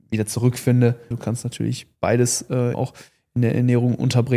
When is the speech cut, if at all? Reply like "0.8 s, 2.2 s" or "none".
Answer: 1.1 s, 2.7 s

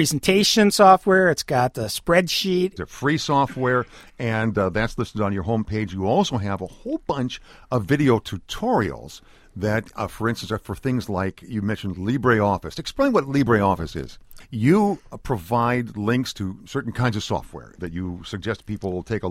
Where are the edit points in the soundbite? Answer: 2.8 s, 14.4 s, 17.8 s

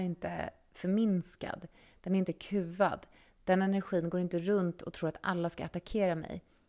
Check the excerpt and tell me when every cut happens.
none

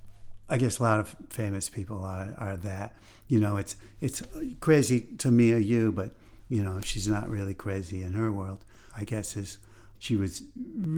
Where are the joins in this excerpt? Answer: 8.9 s, 10.0 s

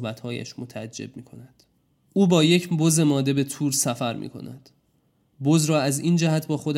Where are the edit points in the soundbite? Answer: 2.0 s

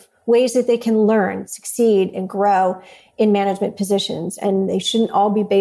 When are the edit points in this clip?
none

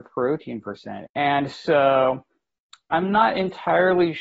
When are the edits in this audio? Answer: 1.1 s

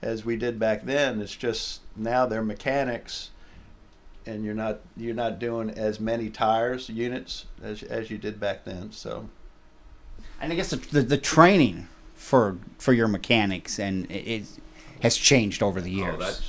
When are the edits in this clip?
none

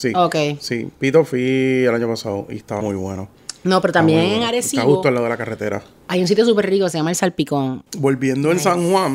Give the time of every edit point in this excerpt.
2.8 s, 7.9 s

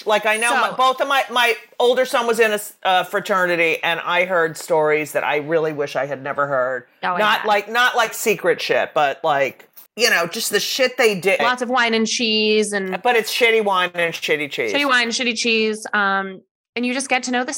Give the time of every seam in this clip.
9.9 s, 11.4 s

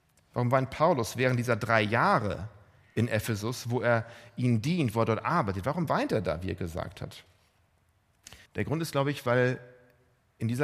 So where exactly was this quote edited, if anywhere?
8.5 s

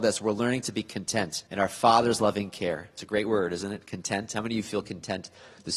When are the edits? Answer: 1.5 s

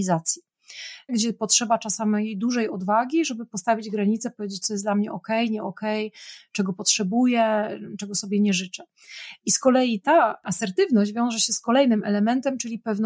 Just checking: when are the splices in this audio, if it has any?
1.1 s

